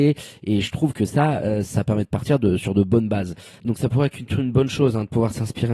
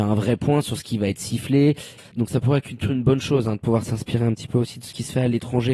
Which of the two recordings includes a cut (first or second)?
second